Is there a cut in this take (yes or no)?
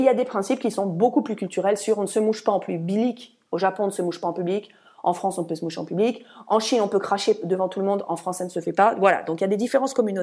no